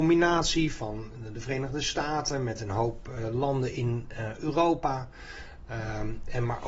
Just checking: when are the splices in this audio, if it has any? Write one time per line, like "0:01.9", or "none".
none